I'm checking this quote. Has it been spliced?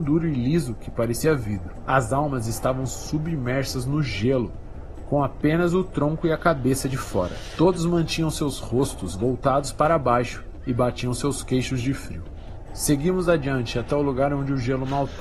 no; 0 cuts

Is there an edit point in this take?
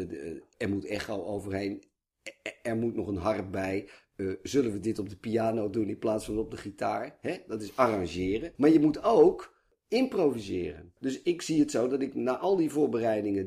no; 0 cuts

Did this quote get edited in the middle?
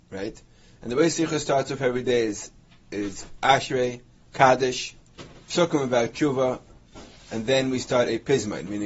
no; 0 cuts

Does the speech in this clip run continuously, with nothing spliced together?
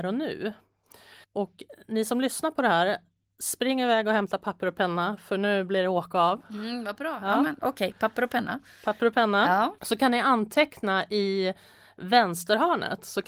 no; 1 cut; at 1.2 s

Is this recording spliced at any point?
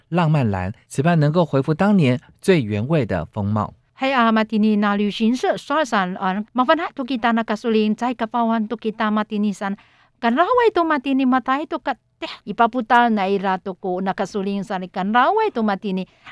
yes; 2 cuts; at 6.4 s, 12.4 s

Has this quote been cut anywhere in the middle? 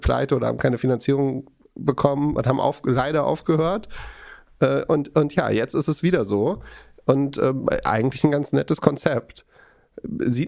no; 0 cuts

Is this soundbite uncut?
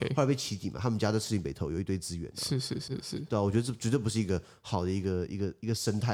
no; 1 cut; at 2.9 s

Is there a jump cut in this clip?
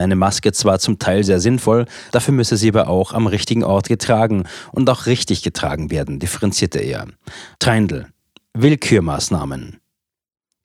yes; 2 cuts; at 2.1 s, 7.5 s

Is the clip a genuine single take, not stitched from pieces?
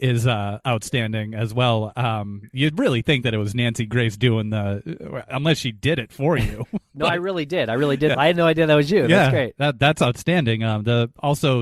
no; 1 cut; at 8.1 s

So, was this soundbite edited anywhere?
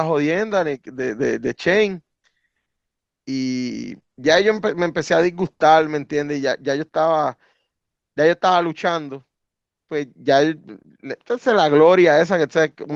yes; 1 cut; at 4.0 s

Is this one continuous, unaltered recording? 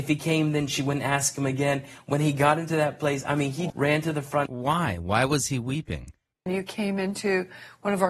no; 2 cuts; at 3.7 s, 6.5 s

